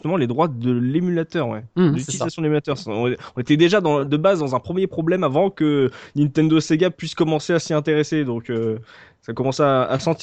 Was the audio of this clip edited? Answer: no; 0 cuts

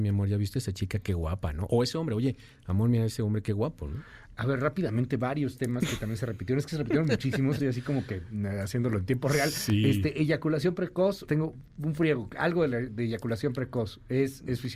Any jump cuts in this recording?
yes; 2 cuts; at 7.6 s, 11.3 s

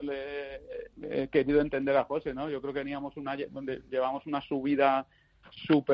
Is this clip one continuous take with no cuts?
yes; 0 cuts

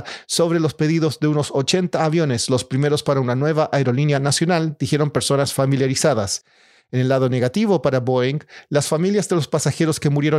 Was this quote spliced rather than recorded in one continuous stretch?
no; 0 cuts

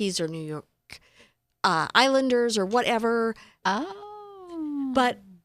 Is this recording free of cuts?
no; 1 cut; at 3.6 s

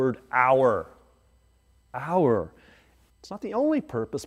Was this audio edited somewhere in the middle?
yes; 1 cut; at 3.1 s

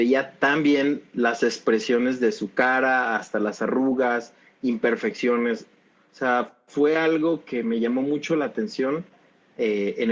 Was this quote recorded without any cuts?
yes; 0 cuts

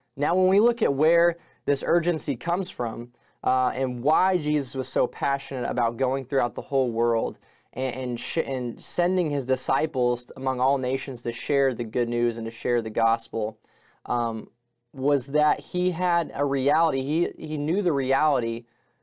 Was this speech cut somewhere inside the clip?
no; 0 cuts

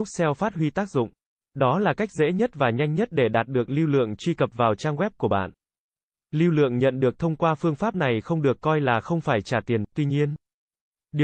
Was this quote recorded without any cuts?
no; 1 cut; at 1.4 s

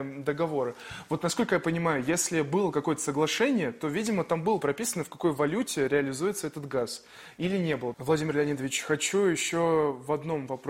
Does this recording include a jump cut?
yes; 1 cut; at 7.9 s

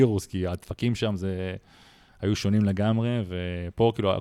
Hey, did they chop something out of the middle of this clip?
no; 0 cuts

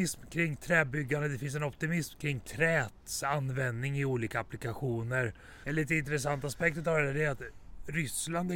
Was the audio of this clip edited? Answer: yes; 1 cut; at 5.6 s

